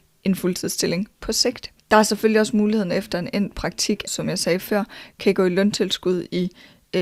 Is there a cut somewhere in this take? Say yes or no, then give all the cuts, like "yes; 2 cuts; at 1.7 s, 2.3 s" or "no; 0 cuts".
yes; 2 cuts; at 1.8 s, 4.1 s